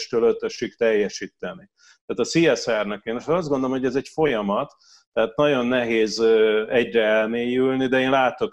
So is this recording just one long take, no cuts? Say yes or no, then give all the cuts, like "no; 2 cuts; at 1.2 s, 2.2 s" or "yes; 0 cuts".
yes; 0 cuts